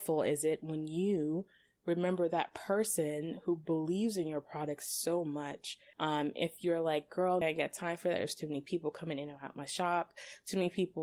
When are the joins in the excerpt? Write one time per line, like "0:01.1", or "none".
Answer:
0:05.9
0:07.4